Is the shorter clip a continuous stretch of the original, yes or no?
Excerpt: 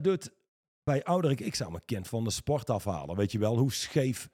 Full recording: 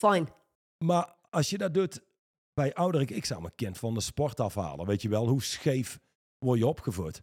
yes